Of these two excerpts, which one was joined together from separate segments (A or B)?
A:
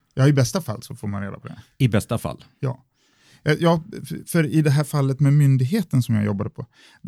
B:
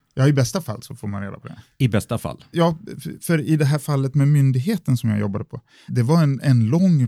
B